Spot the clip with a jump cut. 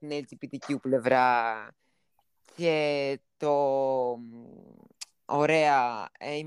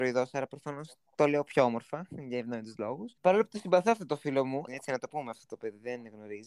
second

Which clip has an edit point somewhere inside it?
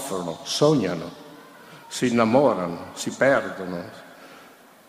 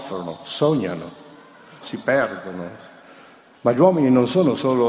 second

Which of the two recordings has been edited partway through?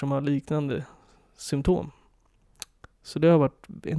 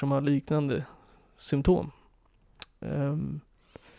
second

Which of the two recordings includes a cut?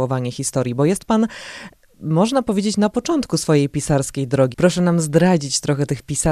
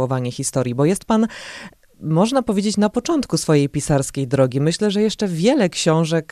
first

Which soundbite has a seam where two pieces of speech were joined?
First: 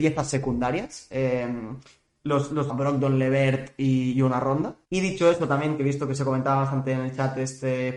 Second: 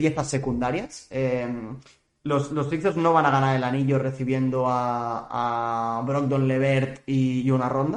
first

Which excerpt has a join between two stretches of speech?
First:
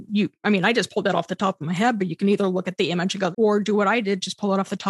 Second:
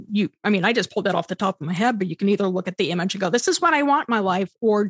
first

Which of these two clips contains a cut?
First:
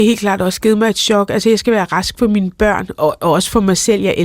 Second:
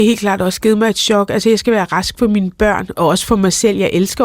second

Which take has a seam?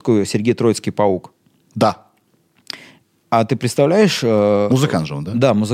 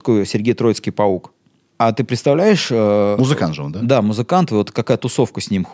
second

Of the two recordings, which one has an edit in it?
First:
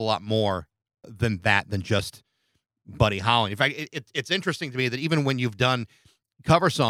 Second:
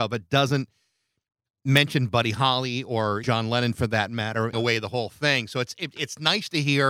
second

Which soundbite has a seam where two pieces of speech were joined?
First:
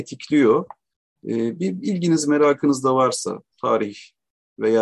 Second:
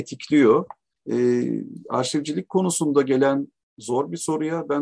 second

